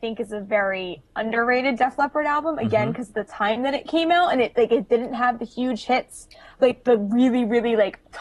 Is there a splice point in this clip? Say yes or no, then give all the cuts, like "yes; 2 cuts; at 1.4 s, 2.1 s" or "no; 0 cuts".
no; 0 cuts